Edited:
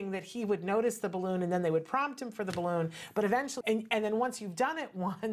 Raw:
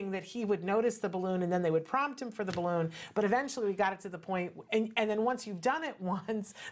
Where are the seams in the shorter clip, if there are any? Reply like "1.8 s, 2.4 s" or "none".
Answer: 3.6 s